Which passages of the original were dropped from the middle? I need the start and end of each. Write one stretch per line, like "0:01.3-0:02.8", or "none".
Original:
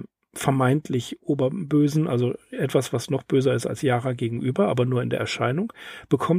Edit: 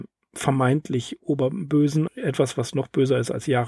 0:02.1-0:02.4